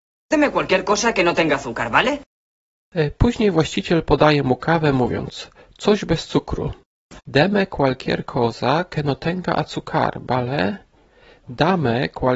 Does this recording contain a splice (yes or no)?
yes